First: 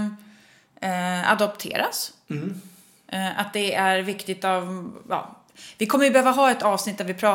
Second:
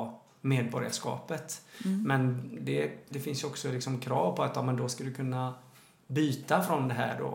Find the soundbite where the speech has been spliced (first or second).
second